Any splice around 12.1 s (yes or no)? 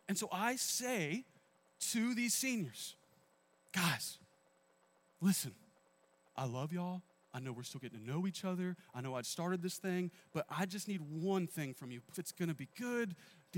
yes